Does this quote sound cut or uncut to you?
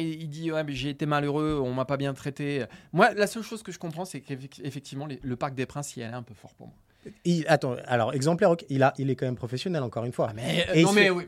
cut